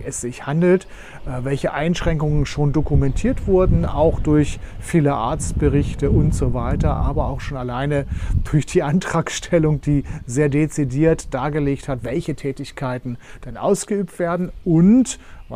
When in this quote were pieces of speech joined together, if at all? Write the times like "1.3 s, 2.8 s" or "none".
none

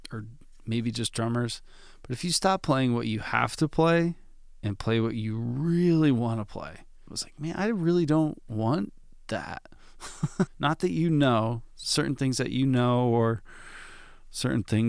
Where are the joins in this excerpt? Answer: 7.1 s, 10.5 s

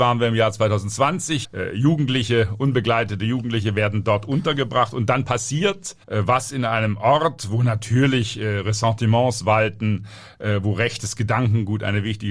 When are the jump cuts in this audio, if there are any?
1.4 s, 6.0 s

